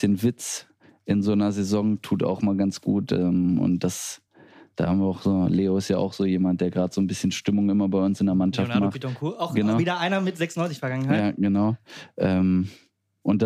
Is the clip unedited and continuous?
yes; 0 cuts

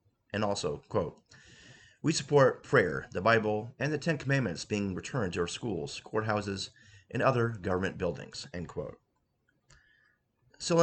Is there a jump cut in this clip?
no; 0 cuts

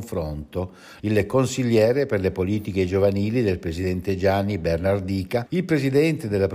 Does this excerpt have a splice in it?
yes; 2 cuts; at 1.0 s, 5.5 s

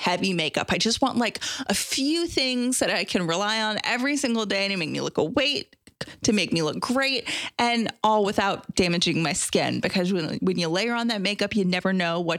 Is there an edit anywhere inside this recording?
no; 0 cuts

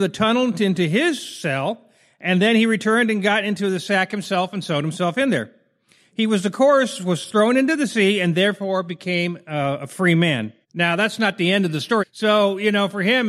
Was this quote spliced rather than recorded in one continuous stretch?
yes; 2 cuts; at 10.6 s, 12.0 s

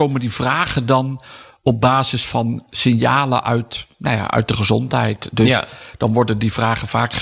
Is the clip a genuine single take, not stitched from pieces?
yes; 0 cuts

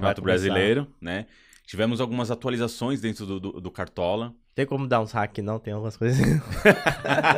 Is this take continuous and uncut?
yes; 0 cuts

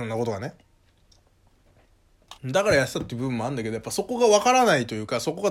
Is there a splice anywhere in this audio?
yes; 1 cut; at 2.4 s

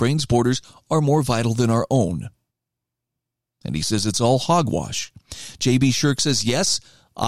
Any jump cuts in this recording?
no; 0 cuts

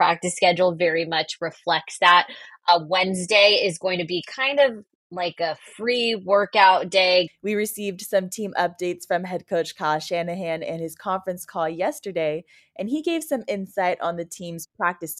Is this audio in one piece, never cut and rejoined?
no; 1 cut; at 7.3 s

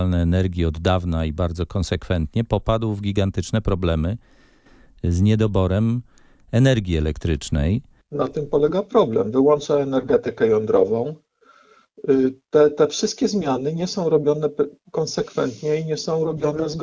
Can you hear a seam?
yes; 1 cut; at 8.0 s

